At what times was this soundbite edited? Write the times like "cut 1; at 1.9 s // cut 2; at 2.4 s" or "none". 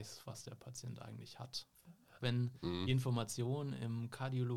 cut 1; at 2.2 s

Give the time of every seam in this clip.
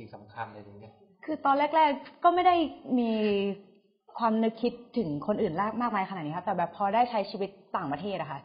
none

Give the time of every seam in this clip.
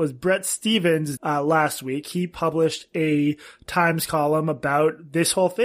cut 1; at 1.2 s

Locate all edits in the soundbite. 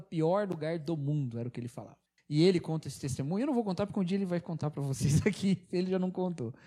cut 1; at 2.2 s

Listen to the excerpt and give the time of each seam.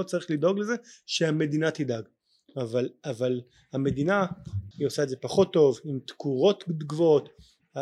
cut 1; at 4.7 s

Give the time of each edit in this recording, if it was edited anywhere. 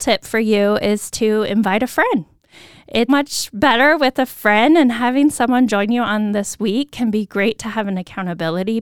cut 1; at 3.1 s

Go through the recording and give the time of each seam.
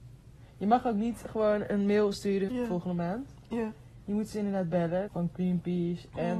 cut 1; at 2.5 s // cut 2; at 5.1 s

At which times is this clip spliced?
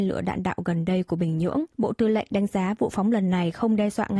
cut 1; at 1.7 s

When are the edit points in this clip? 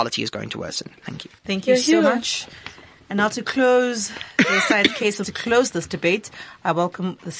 cut 1; at 1.4 s // cut 2; at 5.2 s

